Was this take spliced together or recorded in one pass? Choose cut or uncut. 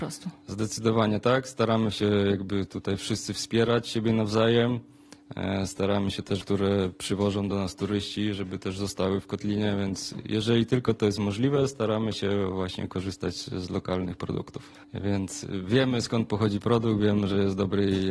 cut